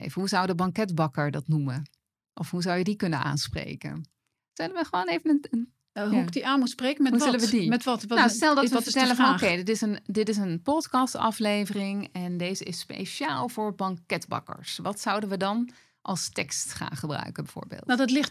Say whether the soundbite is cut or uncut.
uncut